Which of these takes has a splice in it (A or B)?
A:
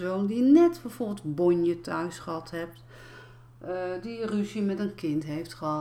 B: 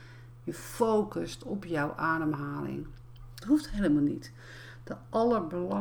B